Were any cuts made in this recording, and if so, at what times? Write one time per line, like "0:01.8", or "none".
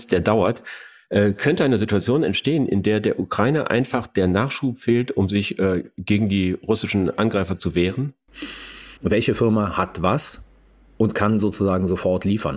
0:09.0